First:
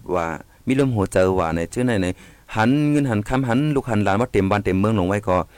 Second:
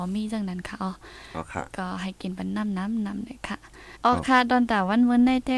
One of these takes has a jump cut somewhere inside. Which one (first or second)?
second